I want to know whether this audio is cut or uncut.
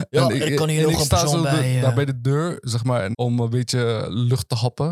cut